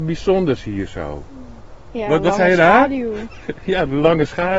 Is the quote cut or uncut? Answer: uncut